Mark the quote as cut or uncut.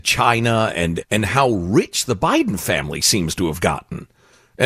cut